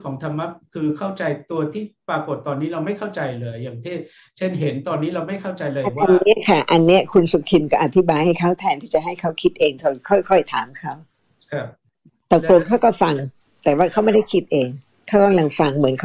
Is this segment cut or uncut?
uncut